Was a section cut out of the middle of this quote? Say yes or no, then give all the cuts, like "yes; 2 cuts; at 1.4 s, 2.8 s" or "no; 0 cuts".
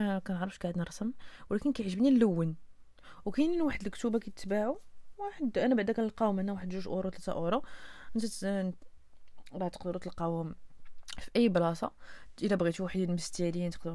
no; 0 cuts